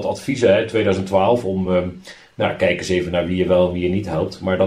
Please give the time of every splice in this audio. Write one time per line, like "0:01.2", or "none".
none

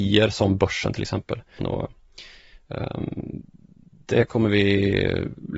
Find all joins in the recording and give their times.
0:01.6

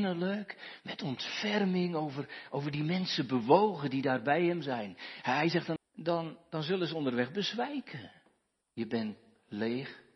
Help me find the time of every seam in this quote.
0:05.8
0:08.6

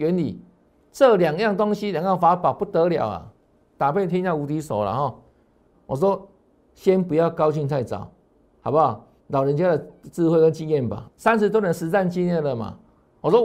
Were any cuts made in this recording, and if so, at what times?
0:05.7
0:09.2
0:11.0

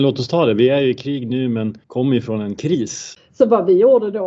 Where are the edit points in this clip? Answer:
0:01.8
0:03.2

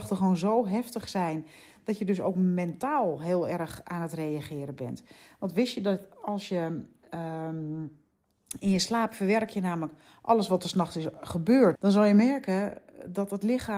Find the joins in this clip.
0:11.8

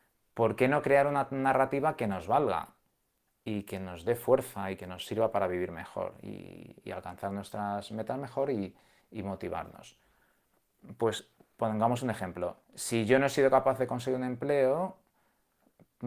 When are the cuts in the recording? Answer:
0:12.6

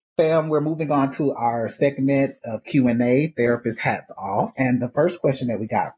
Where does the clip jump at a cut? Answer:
0:04.5

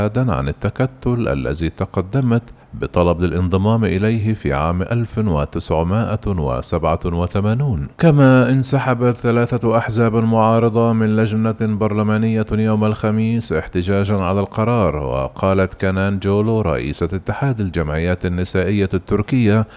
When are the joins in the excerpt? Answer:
0:02.6
0:07.9

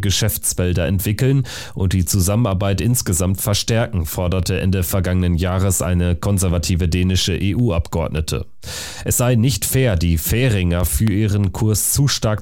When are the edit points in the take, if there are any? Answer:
none

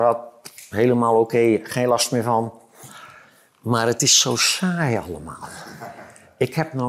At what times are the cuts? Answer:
none

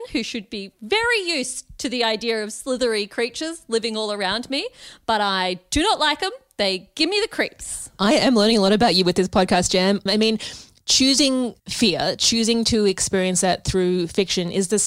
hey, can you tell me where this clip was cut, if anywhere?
0:10.1
0:11.6

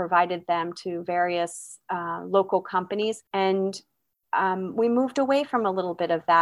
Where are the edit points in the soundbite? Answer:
0:03.3

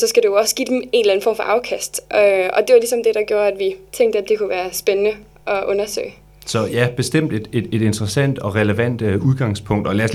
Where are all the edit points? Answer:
0:03.9

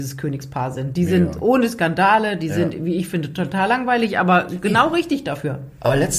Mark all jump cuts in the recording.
none

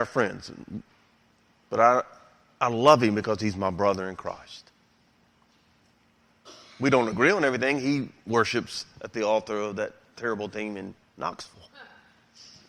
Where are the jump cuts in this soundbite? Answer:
none

